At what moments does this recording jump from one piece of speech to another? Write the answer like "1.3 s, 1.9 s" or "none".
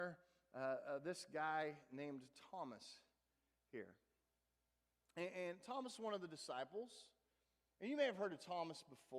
none